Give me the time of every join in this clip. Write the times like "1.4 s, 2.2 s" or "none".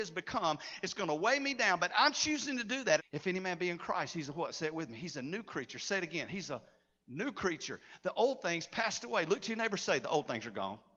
3.0 s